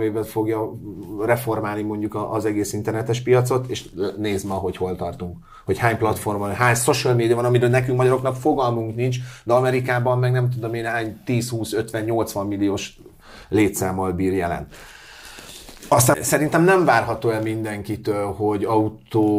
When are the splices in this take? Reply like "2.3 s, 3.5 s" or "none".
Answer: 16.1 s